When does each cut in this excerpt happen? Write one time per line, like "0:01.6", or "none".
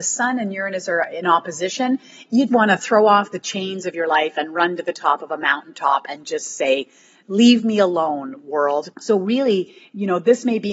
0:02.5
0:08.9